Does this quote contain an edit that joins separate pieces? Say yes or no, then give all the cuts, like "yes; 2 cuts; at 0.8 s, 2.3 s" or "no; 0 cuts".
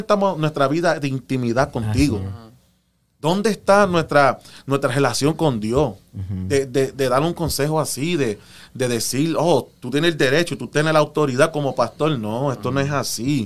no; 0 cuts